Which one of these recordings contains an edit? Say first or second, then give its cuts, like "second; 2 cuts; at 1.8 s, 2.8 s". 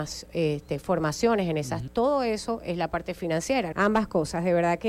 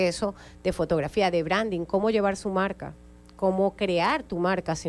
first; 2 cuts; at 1.9 s, 3.7 s